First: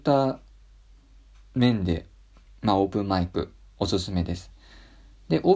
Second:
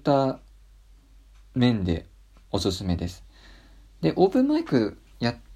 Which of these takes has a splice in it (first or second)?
second